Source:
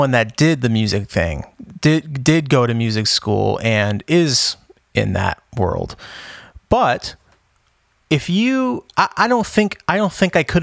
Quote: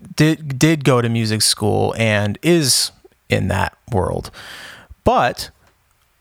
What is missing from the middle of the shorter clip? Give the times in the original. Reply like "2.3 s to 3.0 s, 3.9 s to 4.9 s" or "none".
none